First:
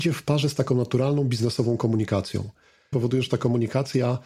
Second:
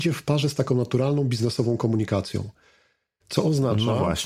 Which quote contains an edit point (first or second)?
first